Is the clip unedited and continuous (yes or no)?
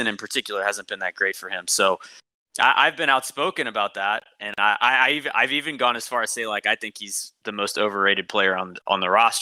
yes